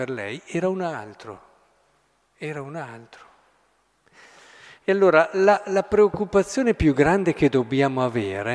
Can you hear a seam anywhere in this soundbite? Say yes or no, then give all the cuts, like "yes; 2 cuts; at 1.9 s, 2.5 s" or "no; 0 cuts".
no; 0 cuts